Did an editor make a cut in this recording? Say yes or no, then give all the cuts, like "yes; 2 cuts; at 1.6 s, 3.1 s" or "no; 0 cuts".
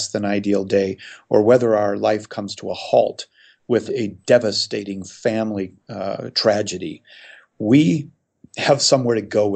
yes; 1 cut; at 3.9 s